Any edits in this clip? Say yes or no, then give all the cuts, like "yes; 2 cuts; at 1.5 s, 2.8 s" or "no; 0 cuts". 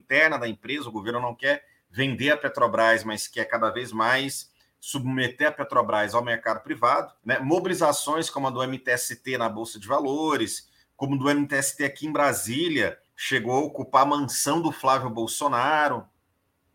yes; 2 cuts; at 7.2 s, 13.1 s